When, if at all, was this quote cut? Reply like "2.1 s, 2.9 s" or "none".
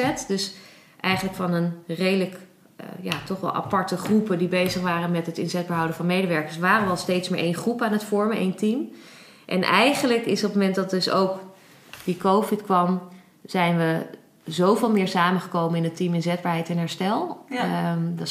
none